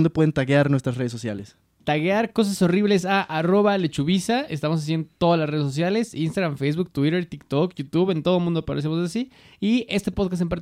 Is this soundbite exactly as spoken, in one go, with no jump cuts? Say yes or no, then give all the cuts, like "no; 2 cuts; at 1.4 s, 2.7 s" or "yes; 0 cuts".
yes; 0 cuts